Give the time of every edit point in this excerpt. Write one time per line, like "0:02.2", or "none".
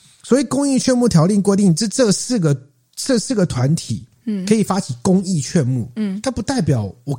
none